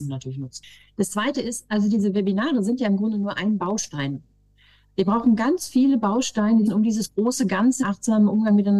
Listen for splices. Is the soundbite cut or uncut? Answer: cut